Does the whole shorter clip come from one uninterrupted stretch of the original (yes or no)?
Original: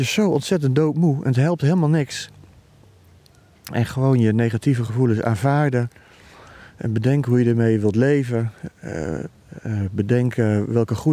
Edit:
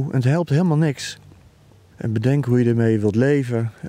no